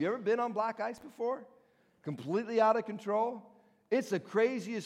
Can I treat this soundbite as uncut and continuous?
yes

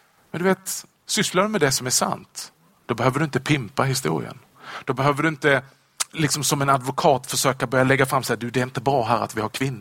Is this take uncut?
no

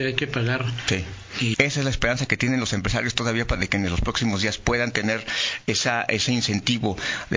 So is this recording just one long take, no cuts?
no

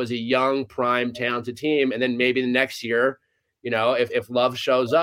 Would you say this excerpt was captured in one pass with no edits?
yes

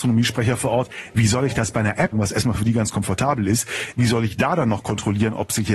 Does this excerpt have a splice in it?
yes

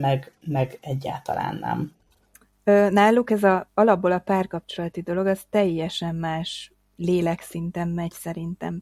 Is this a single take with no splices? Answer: yes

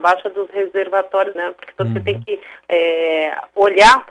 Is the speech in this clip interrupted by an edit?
yes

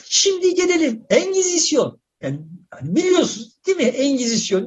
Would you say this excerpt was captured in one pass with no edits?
yes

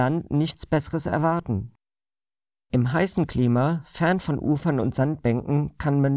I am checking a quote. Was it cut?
no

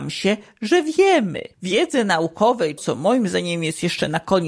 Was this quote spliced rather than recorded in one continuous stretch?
yes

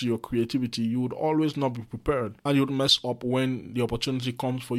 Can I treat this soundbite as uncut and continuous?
no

